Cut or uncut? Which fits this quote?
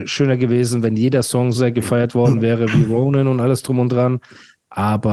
cut